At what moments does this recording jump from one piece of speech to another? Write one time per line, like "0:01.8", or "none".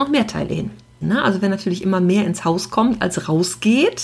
0:01.0